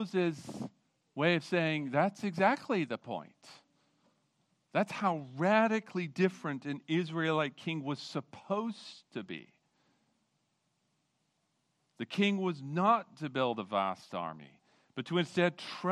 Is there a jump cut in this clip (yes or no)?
no